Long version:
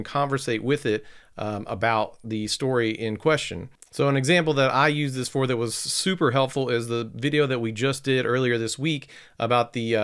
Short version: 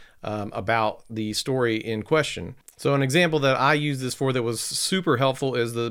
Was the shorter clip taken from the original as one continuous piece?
yes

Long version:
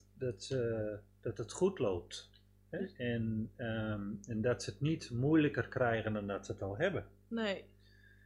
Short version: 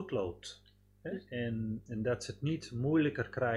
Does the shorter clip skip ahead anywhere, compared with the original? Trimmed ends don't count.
yes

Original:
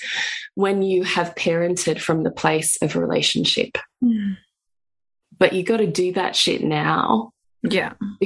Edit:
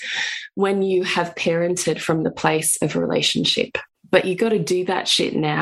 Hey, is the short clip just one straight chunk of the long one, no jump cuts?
no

